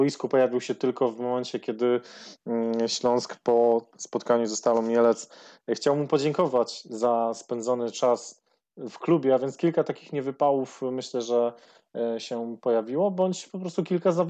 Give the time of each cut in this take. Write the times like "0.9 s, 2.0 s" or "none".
none